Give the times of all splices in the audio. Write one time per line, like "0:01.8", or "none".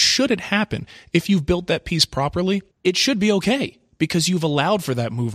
0:02.7